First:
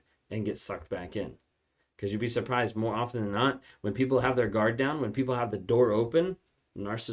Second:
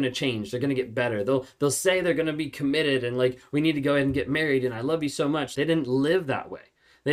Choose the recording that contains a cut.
second; 1 cut; at 5.5 s

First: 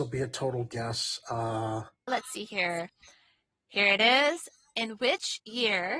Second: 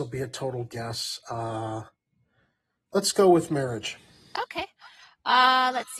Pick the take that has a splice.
first; 1 cut; at 2.1 s

